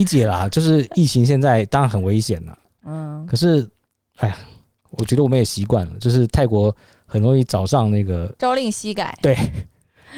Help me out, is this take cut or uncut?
uncut